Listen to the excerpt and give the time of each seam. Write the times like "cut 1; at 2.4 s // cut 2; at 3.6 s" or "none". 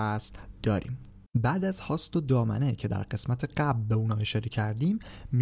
cut 1; at 1.3 s

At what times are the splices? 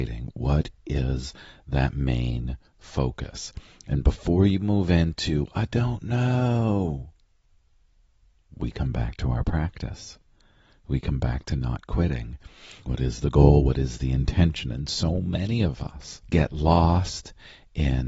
cut 1; at 12.9 s // cut 2; at 16.2 s

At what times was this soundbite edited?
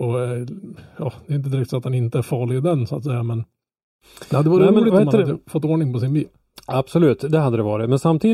none

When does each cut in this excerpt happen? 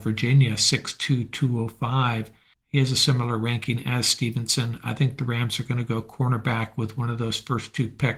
none

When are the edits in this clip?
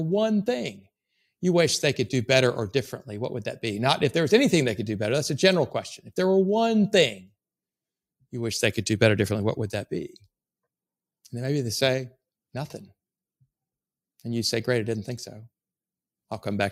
none

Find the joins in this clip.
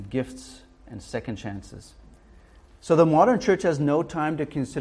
cut 1; at 2.7 s

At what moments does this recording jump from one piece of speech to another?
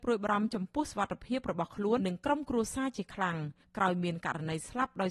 cut 1; at 2.0 s

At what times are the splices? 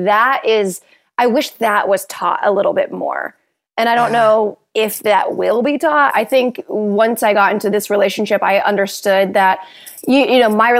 cut 1; at 6.1 s

